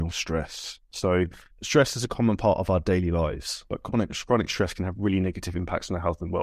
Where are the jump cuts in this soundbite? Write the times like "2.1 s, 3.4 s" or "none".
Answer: 1.5 s

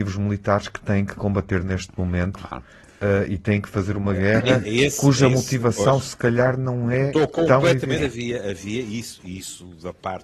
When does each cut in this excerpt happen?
8.0 s

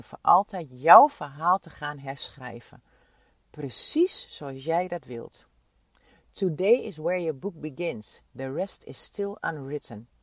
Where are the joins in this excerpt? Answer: none

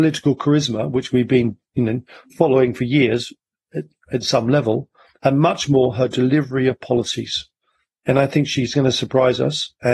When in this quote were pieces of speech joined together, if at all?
none

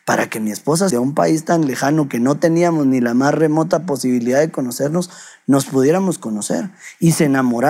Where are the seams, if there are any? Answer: 0.9 s

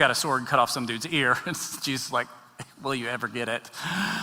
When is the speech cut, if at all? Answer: none

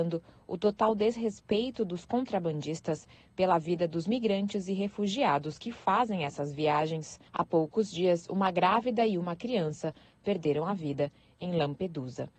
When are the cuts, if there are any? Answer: 7.3 s

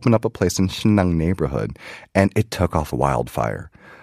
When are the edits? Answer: 2.9 s

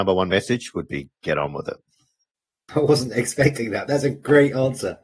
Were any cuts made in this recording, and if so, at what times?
3.9 s

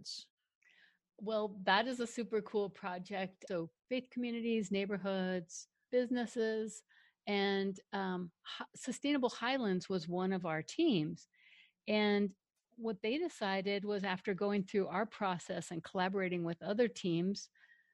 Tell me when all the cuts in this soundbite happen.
3.5 s, 5.9 s

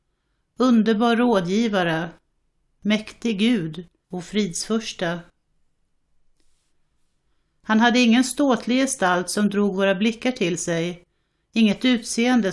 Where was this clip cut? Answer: 4.0 s, 7.6 s

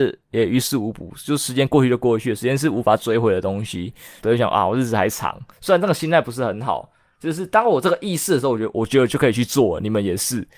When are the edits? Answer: 4.2 s

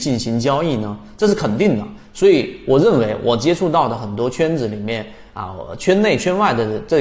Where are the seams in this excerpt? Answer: none

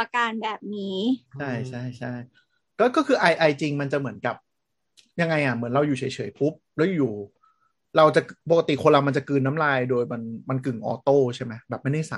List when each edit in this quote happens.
1.3 s

